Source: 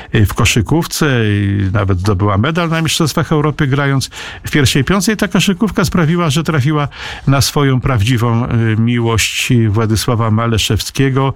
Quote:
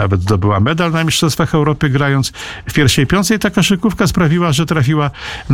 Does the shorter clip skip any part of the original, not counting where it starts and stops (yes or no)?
no